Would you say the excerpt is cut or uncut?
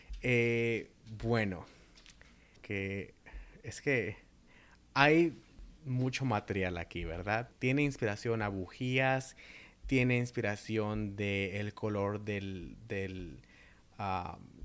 cut